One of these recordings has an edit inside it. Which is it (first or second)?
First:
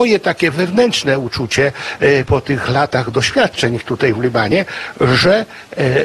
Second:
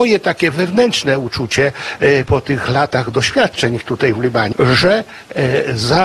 second